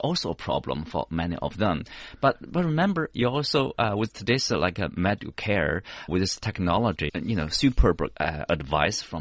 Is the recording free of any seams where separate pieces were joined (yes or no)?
no